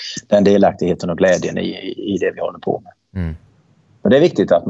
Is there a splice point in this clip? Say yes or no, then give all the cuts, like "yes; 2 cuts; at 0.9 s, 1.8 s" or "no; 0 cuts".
no; 0 cuts